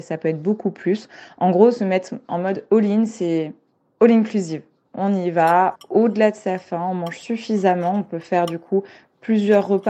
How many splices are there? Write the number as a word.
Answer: one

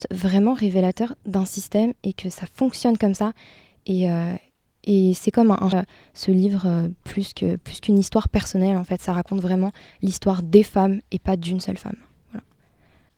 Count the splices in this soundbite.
one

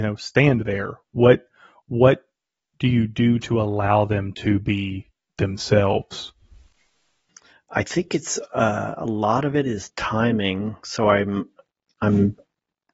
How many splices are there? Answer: zero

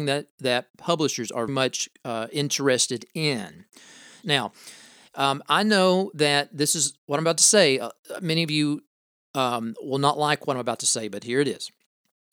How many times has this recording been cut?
two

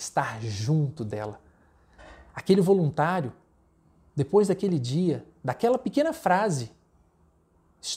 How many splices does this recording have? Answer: zero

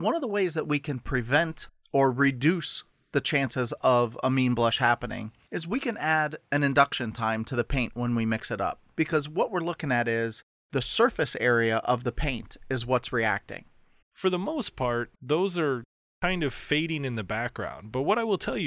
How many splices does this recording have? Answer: two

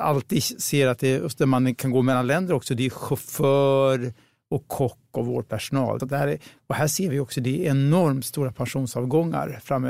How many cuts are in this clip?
one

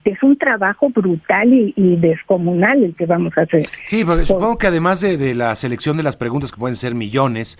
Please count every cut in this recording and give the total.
zero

